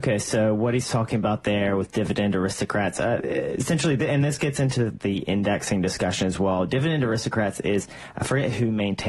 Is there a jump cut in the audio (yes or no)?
no